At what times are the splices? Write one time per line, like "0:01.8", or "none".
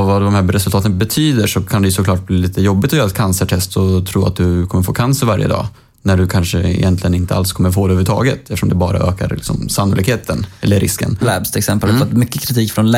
0:11.2